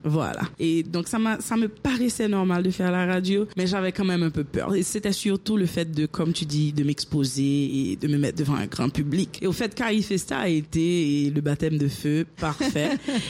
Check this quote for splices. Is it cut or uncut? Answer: uncut